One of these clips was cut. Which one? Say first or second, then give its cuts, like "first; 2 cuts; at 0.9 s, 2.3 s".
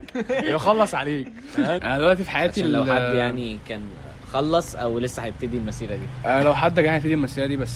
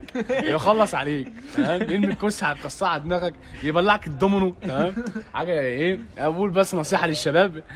first; 1 cut; at 1.8 s